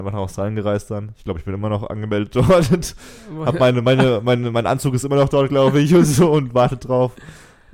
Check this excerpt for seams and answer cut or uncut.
uncut